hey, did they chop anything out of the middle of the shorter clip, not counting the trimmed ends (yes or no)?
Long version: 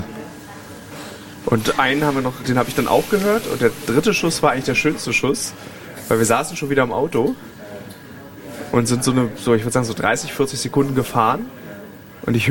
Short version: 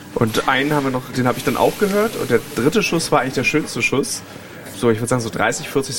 yes